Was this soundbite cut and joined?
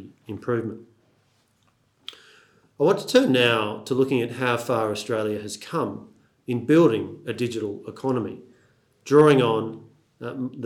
no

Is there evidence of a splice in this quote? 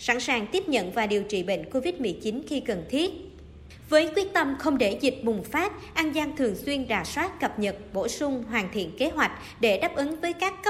no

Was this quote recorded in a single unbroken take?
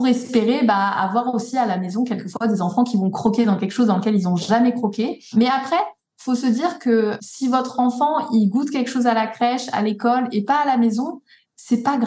yes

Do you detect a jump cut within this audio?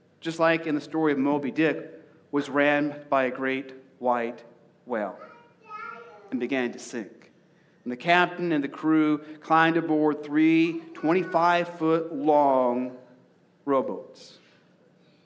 no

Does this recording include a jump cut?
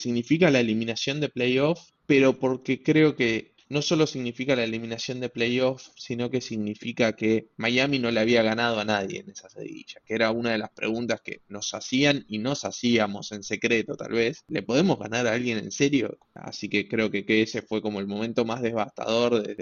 yes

